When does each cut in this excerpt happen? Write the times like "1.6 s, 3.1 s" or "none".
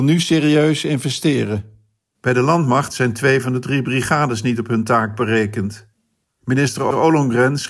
2.1 s, 6.2 s